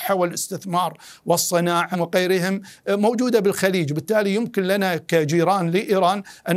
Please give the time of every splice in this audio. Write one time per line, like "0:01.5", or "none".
0:01.9